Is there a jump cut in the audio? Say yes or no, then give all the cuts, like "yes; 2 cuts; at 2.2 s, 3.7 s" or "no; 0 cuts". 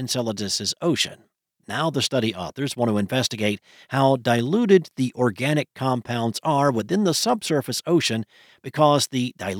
no; 0 cuts